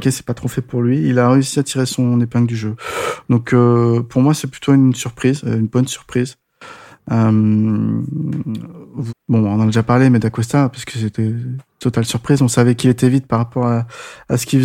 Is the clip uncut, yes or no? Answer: no